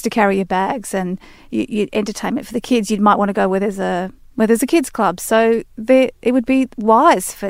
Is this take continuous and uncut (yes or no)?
yes